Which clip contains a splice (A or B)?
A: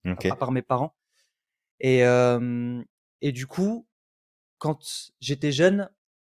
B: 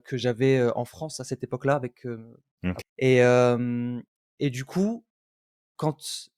B